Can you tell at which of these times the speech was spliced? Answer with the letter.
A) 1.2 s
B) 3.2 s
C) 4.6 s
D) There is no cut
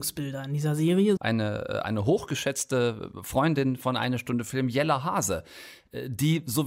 A